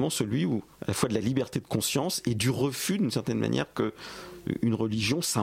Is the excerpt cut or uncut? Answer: uncut